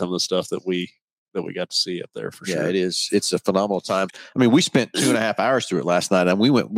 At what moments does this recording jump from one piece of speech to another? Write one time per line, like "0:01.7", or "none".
0:04.1